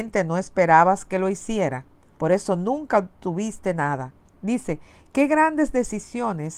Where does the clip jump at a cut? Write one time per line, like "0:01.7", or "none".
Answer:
0:02.2
0:04.3